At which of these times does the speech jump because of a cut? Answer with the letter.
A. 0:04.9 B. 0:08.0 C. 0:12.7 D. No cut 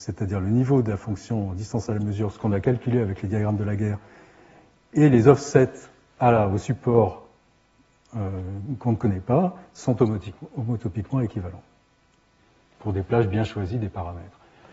D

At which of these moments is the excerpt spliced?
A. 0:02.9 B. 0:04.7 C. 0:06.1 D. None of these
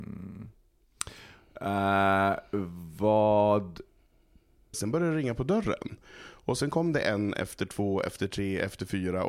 B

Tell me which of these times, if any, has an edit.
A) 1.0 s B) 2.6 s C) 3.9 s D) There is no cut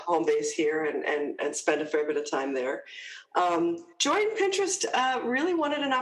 C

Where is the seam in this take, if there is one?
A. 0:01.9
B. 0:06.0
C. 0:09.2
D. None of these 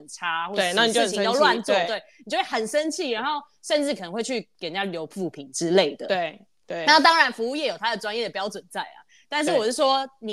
D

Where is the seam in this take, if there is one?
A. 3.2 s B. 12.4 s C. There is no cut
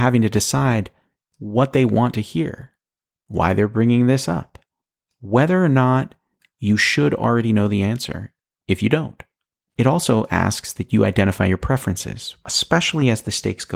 B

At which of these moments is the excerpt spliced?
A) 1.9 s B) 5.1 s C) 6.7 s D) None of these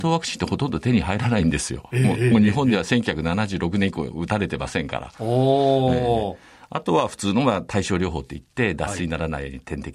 D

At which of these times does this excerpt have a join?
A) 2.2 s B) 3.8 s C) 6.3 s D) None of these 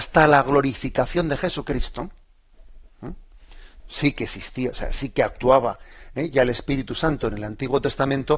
B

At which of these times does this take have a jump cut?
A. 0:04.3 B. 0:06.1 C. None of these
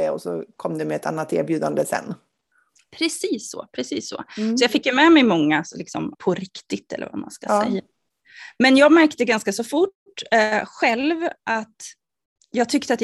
B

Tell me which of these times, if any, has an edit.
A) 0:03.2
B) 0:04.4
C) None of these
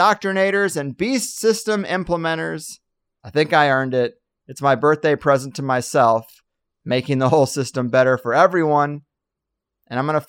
A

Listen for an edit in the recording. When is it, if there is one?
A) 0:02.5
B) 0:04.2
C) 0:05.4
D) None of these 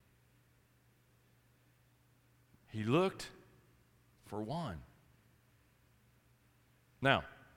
A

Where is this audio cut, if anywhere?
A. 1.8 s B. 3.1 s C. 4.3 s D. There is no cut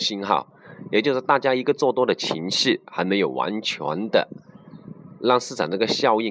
D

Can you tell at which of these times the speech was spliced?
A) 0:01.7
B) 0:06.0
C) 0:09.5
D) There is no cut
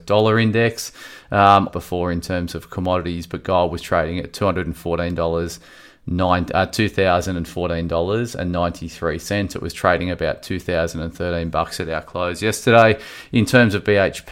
A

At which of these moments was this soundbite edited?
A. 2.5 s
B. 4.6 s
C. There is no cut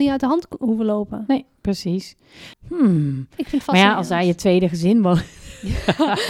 A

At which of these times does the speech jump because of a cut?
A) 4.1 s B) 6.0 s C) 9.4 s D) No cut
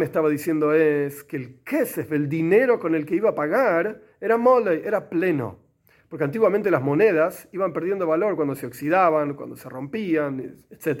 D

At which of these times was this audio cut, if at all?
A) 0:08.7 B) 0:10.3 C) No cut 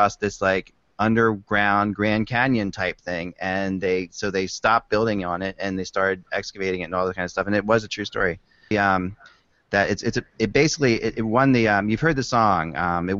A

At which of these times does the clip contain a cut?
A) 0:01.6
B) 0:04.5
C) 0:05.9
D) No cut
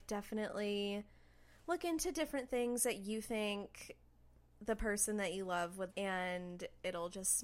C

